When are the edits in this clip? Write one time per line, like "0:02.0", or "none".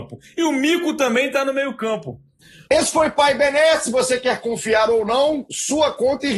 0:02.6